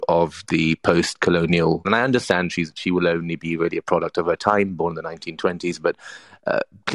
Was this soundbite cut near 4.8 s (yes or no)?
no